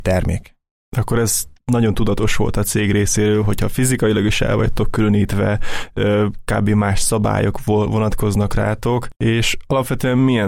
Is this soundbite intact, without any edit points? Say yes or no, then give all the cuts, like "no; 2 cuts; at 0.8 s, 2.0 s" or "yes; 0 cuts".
no; 1 cut; at 9.1 s